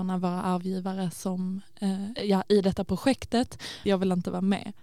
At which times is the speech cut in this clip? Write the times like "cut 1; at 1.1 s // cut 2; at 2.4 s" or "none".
cut 1; at 2.2 s // cut 2; at 3.8 s